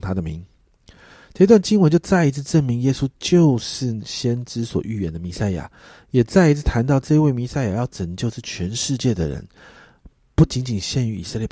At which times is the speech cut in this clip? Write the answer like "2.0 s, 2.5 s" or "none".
none

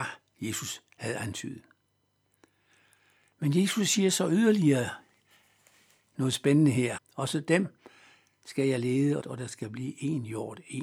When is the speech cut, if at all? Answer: 7.0 s, 9.2 s

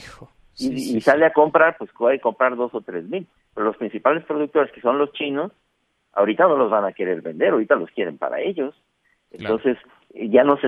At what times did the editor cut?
none

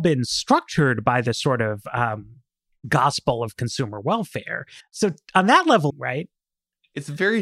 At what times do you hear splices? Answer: 4.8 s, 5.9 s

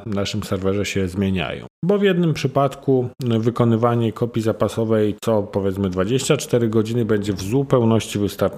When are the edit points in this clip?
none

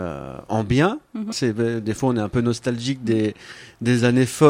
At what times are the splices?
1.3 s

